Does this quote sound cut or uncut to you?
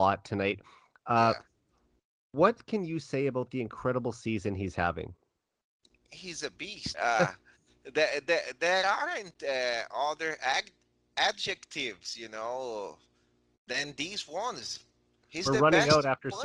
cut